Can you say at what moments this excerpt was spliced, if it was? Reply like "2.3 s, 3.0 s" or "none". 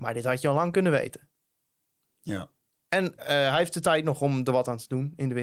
none